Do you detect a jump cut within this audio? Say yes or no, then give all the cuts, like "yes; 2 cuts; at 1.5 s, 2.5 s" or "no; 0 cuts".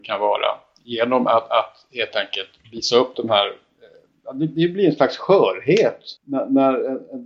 yes; 1 cut; at 6.2 s